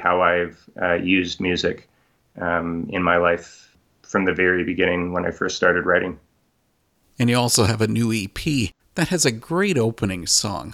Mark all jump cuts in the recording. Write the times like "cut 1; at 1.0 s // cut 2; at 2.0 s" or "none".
cut 1; at 7.1 s // cut 2; at 8.8 s

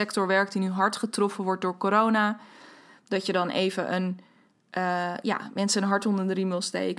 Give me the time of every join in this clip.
none

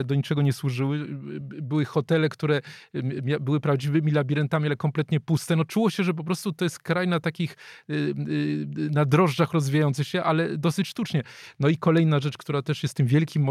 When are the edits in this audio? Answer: none

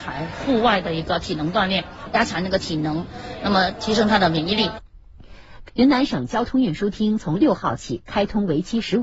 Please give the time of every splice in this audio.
cut 1; at 5.7 s

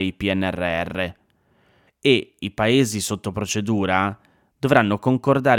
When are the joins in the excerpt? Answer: cut 1; at 1.9 s

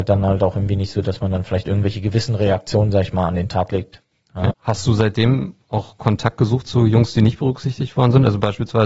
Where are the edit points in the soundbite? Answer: cut 1; at 4.5 s

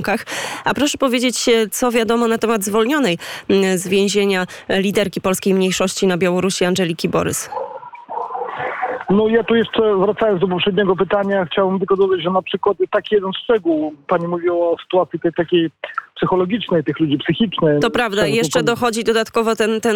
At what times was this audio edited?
cut 1; at 15.3 s // cut 2; at 17.8 s

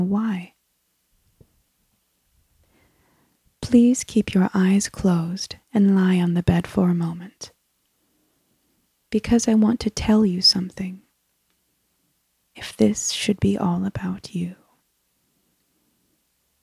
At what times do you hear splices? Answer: cut 1; at 12.5 s

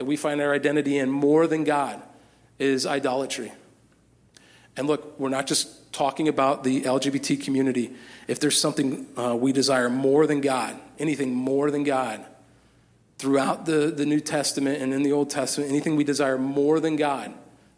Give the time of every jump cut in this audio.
cut 1; at 8.3 s

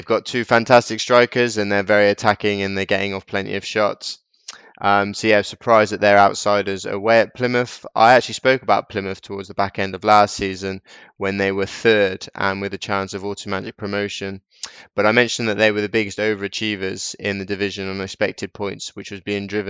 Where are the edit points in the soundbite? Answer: none

